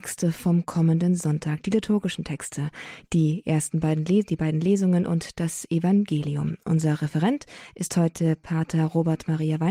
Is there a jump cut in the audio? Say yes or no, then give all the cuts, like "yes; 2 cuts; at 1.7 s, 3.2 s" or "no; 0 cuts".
no; 0 cuts